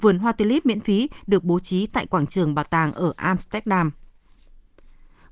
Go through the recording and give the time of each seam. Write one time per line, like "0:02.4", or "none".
none